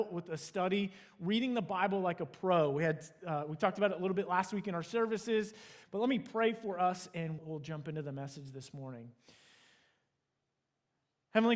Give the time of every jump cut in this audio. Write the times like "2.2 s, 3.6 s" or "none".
5.8 s, 7.4 s